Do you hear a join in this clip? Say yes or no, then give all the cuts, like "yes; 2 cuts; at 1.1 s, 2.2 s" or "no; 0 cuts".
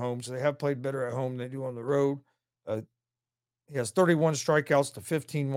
yes; 1 cut; at 2.5 s